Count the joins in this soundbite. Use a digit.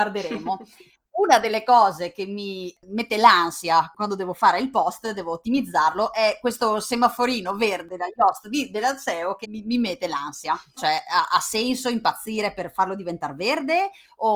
2